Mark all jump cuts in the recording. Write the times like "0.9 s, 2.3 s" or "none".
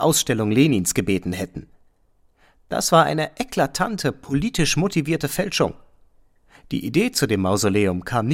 none